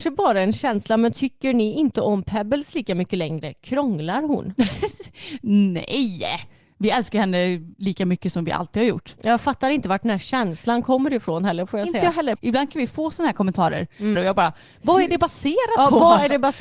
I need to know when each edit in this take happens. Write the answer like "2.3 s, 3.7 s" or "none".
12.3 s, 14.2 s